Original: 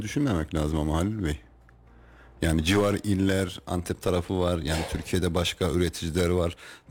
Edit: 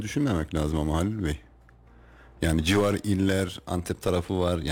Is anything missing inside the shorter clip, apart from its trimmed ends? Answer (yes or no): no